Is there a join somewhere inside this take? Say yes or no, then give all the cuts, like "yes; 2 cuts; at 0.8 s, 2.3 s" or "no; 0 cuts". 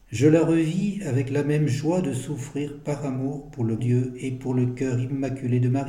yes; 1 cut; at 3.8 s